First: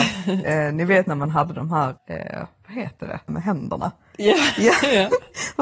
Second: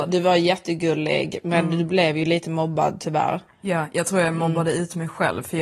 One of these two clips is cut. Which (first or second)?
first